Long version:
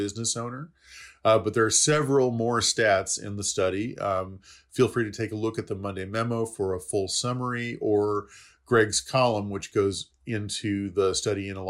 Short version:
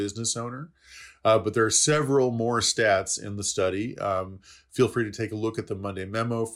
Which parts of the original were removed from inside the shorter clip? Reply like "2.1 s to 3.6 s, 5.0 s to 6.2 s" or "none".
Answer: none